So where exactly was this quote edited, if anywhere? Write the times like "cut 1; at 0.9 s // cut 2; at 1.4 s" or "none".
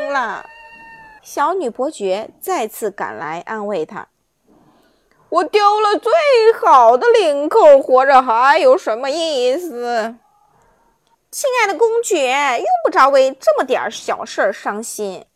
cut 1; at 1.2 s // cut 2; at 11.1 s